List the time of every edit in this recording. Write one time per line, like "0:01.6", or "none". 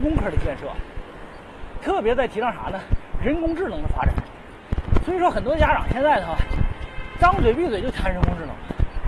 none